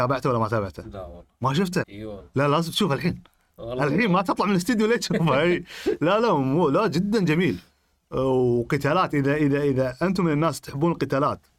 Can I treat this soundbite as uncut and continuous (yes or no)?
no